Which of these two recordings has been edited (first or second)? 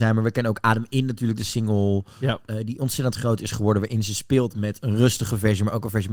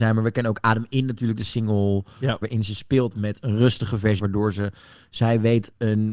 second